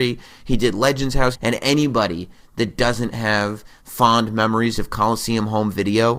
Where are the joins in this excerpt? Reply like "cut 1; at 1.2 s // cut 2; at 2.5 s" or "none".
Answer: cut 1; at 1.3 s